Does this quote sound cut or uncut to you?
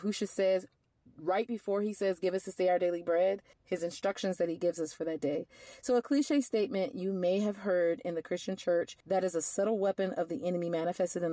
cut